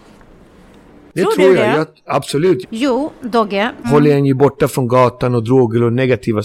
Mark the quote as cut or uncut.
cut